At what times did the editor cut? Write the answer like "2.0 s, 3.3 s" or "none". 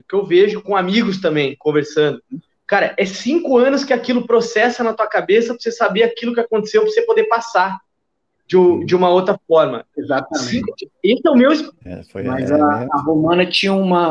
9.9 s, 11.7 s